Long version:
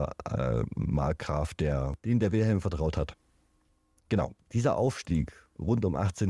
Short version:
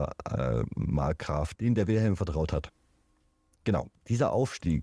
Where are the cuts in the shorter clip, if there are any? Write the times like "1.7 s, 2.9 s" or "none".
1.5 s